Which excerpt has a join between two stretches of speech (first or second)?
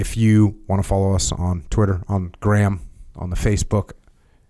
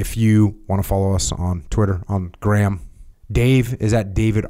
second